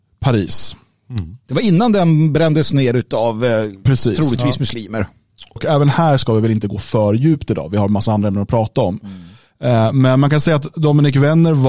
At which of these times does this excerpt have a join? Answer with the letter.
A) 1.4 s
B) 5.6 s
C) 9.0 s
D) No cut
B